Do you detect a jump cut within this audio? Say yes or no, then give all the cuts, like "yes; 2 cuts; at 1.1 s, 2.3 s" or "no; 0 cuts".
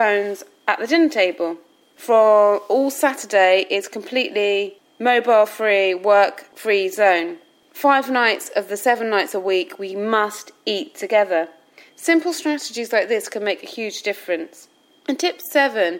no; 0 cuts